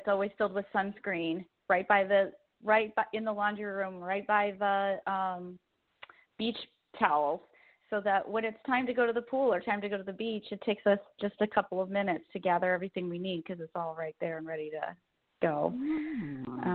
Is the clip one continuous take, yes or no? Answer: yes